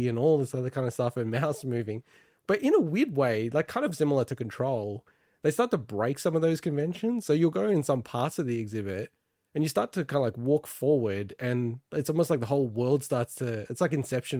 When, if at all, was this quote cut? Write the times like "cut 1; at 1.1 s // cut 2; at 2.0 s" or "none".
none